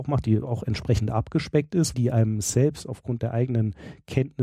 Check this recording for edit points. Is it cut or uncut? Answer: cut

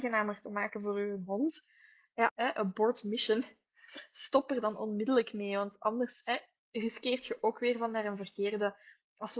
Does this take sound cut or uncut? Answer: cut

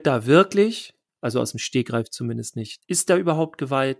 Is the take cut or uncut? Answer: cut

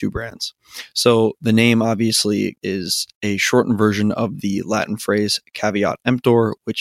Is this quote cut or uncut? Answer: cut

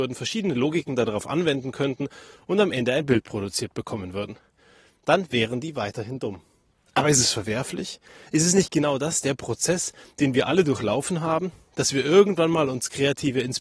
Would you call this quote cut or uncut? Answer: uncut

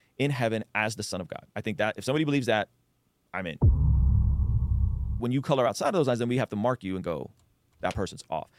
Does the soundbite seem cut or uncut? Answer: cut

